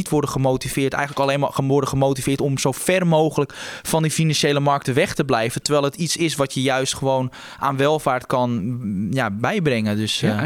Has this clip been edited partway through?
no; 0 cuts

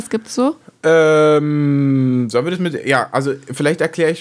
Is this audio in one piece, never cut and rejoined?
yes; 0 cuts

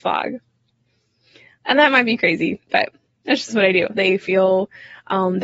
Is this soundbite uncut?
no; 1 cut; at 3.9 s

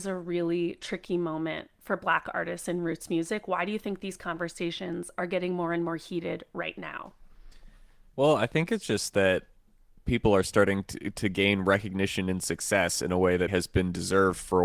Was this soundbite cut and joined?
yes; 1 cut; at 13.5 s

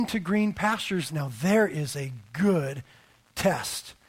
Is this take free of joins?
no; 1 cut; at 1.1 s

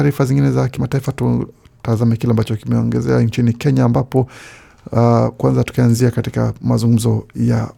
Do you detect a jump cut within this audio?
no; 0 cuts

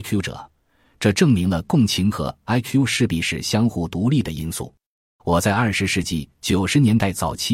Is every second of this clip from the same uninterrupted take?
no; 1 cut; at 5.2 s

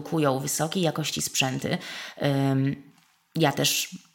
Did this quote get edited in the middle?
no; 0 cuts

